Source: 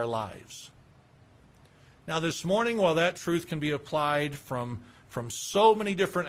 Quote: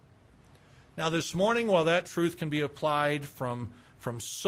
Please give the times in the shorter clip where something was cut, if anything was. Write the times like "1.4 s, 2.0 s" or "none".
none